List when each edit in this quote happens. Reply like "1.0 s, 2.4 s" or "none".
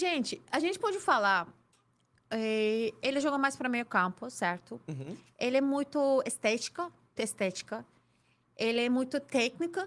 7.2 s